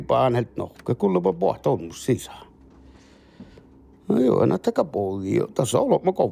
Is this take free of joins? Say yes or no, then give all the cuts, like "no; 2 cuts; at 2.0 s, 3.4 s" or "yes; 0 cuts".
yes; 0 cuts